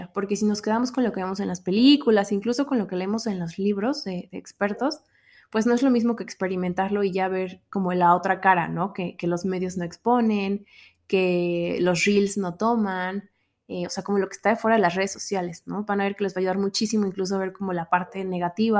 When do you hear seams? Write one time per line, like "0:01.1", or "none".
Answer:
none